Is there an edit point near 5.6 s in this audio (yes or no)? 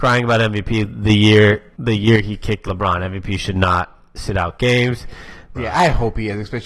yes